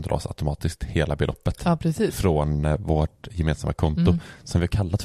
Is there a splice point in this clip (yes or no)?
no